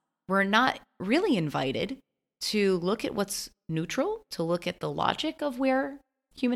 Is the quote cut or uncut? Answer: uncut